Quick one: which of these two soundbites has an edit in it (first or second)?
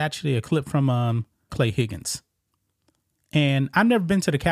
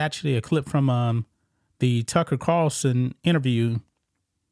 first